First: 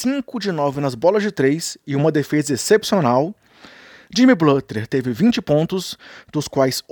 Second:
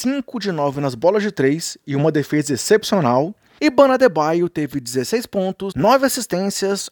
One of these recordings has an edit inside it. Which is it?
second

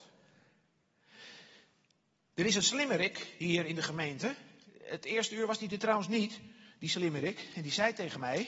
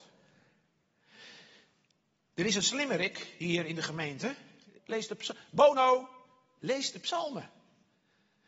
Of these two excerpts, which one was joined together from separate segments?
second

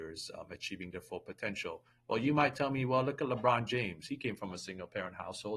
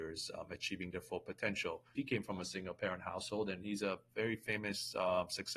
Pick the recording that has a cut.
second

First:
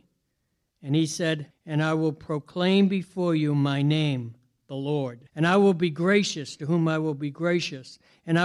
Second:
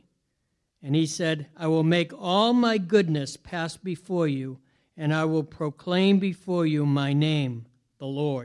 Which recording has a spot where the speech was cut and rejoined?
first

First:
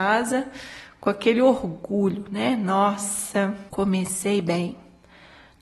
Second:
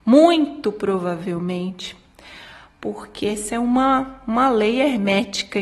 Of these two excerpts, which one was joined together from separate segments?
first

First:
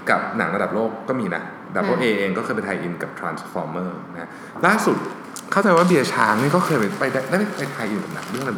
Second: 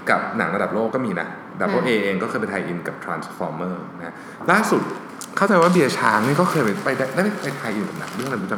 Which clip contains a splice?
second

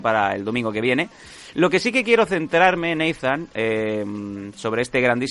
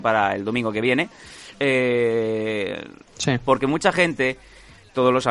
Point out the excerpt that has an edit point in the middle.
second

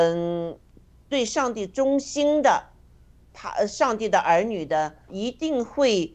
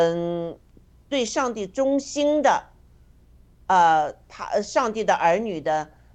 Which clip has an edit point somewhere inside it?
first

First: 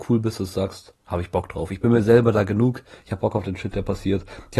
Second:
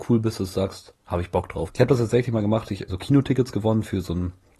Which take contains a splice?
second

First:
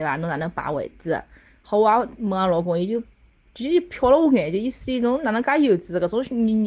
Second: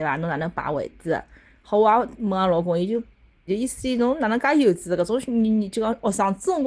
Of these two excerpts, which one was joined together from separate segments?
second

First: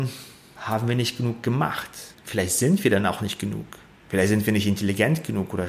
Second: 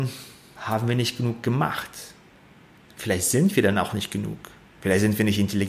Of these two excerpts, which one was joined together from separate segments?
first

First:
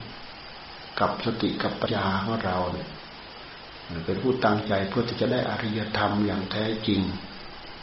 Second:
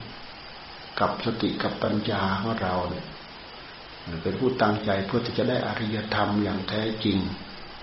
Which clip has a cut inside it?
first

